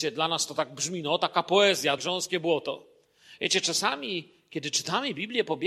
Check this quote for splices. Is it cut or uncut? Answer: cut